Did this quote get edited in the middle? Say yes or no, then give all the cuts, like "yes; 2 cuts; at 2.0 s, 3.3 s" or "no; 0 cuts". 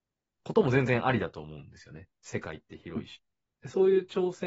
no; 0 cuts